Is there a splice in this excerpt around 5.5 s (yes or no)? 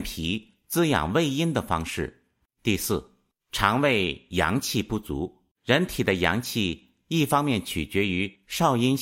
yes